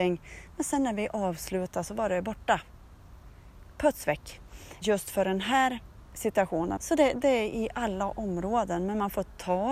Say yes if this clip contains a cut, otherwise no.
yes